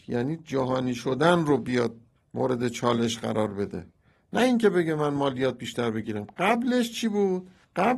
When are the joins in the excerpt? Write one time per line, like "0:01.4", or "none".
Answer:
none